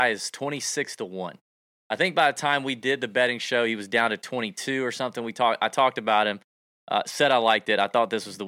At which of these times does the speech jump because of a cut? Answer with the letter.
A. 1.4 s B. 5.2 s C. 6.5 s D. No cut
D